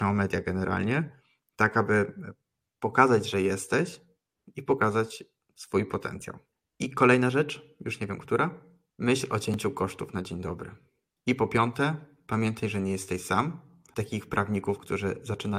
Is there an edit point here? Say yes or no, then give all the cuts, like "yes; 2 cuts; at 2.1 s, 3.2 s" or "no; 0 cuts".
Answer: no; 0 cuts